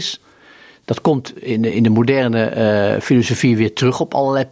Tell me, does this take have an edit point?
no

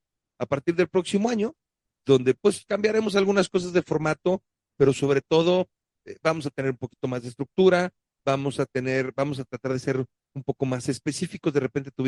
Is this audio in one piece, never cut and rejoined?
yes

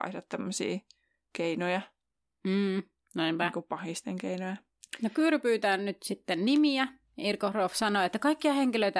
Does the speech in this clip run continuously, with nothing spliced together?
yes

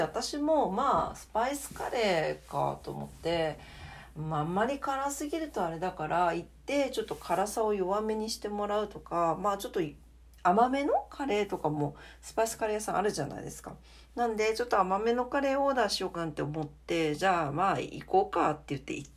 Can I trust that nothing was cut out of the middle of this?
no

